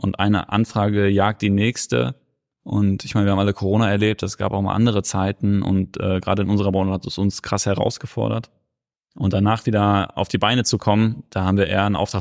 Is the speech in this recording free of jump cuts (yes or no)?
yes